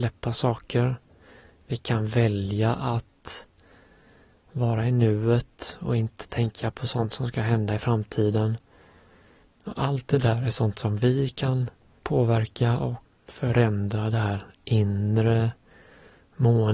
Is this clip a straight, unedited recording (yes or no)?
yes